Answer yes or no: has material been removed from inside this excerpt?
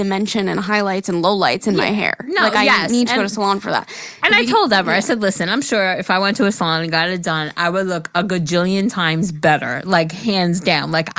no